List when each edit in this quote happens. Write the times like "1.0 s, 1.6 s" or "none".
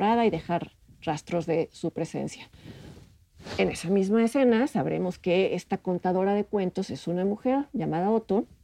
none